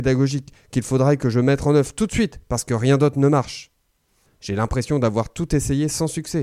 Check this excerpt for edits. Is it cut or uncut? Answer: cut